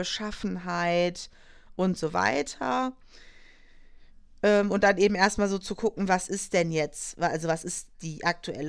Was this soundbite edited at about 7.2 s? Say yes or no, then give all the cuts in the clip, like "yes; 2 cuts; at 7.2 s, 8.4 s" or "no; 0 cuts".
no; 0 cuts